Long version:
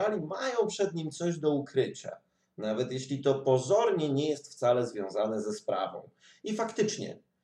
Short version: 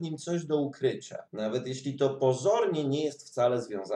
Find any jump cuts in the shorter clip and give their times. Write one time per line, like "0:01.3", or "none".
0:01.3